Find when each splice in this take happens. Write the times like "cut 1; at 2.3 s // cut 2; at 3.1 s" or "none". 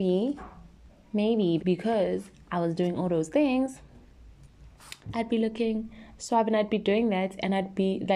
cut 1; at 1.6 s // cut 2; at 5.0 s